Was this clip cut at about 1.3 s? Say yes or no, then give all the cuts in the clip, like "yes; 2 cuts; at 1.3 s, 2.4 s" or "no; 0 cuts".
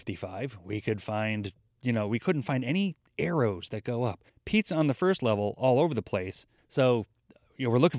no; 2 cuts; at 4.3 s, 6.6 s